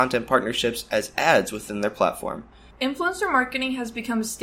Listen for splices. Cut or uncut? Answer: cut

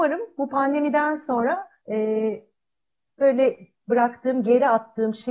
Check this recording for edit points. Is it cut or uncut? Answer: cut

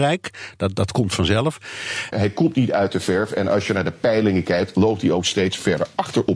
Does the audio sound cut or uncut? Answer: cut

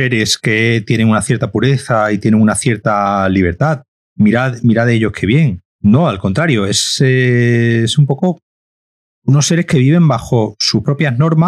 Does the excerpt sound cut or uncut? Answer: cut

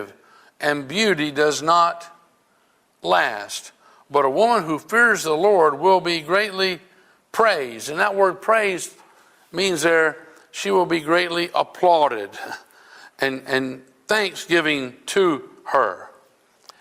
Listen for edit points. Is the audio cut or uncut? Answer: uncut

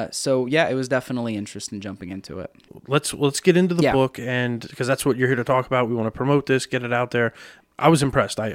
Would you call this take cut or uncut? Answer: uncut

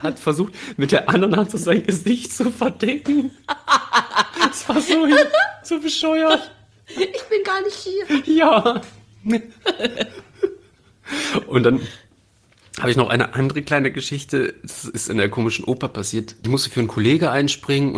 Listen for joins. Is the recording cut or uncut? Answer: uncut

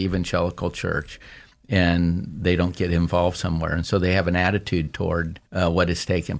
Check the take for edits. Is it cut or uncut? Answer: cut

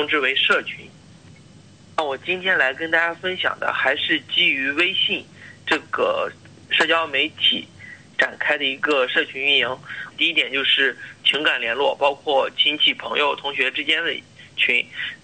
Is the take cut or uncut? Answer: cut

